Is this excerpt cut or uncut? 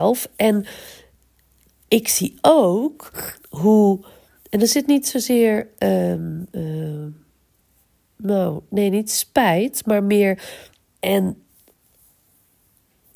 cut